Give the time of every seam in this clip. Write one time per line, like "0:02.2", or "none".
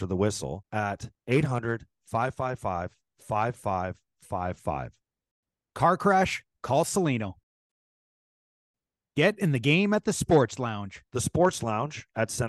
none